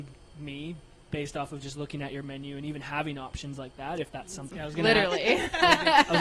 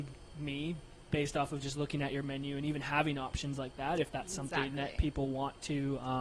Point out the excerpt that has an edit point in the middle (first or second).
first